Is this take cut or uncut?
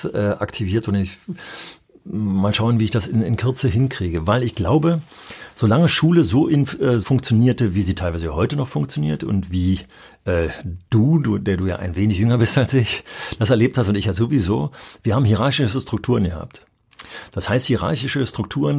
cut